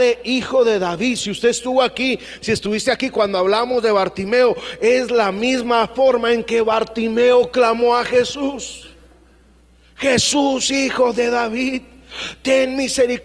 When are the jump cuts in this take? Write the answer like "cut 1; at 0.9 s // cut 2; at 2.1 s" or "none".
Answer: none